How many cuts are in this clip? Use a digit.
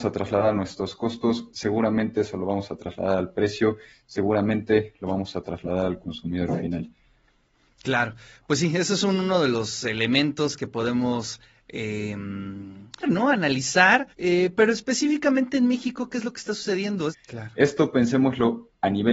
3